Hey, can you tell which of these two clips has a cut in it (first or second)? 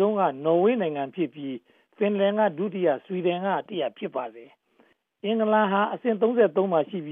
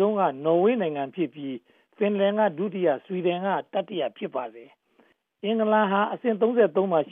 first